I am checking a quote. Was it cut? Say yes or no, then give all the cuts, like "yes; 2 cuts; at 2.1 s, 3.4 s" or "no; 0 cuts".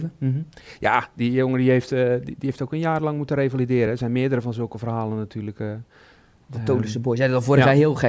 no; 0 cuts